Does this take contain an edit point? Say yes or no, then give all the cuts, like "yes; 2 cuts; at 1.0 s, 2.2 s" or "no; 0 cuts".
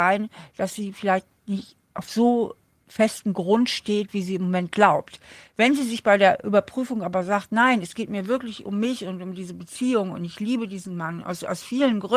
no; 0 cuts